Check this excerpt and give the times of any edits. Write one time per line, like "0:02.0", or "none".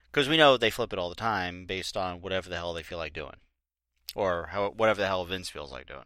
none